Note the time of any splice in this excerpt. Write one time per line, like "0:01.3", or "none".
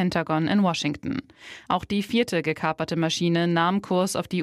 0:01.6